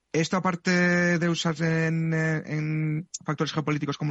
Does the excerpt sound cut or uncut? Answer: uncut